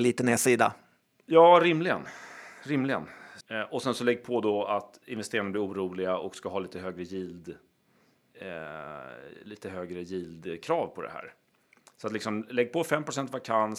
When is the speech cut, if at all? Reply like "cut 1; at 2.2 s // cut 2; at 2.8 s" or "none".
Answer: cut 1; at 3.4 s